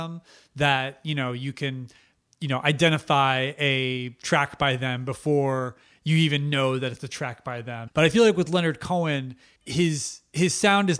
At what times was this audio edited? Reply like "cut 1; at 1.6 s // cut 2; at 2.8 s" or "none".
cut 1; at 7.9 s // cut 2; at 9.6 s